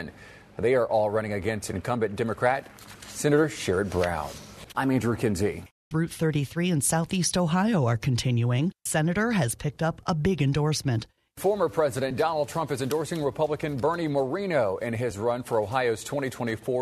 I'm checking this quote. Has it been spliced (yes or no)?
yes